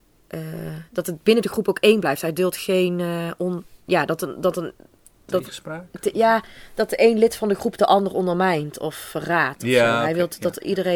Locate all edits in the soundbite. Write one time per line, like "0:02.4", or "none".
none